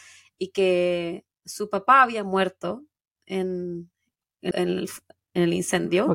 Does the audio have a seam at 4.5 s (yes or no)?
yes